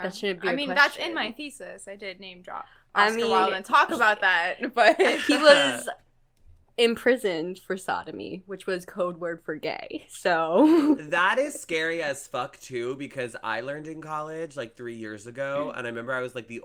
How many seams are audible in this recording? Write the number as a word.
zero